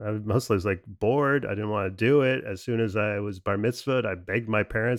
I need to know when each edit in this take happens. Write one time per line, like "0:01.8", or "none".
none